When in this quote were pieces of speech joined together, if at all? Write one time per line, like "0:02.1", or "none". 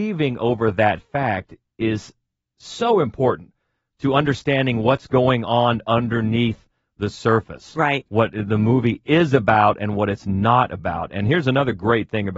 none

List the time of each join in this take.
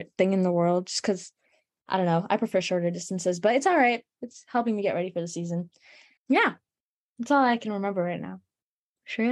0:06.2

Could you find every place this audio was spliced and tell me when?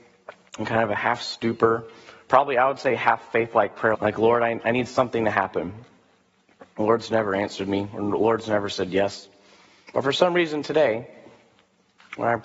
0:03.9
0:06.7

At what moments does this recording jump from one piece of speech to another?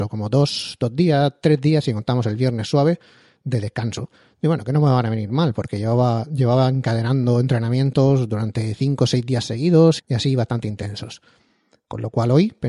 0:10.0

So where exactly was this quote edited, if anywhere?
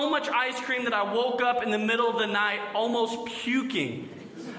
none

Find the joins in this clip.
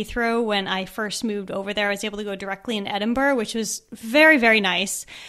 none

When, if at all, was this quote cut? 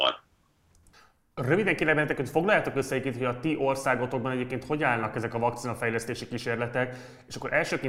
none

